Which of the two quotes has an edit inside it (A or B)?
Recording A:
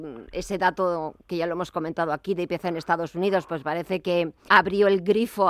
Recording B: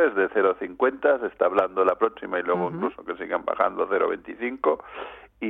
A